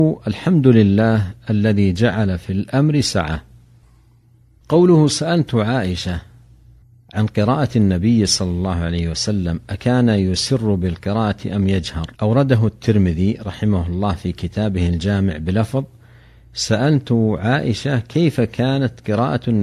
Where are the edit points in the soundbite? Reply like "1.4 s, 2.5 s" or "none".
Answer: 12.1 s